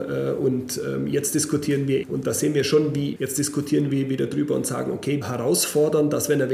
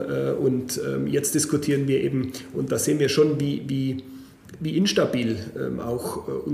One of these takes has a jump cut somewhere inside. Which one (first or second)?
first